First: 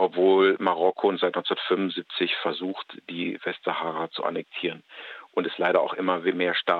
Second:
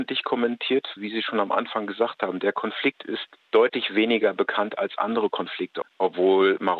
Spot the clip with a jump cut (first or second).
second